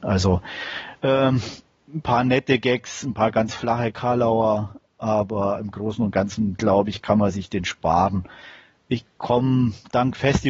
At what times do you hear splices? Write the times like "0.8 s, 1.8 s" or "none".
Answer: none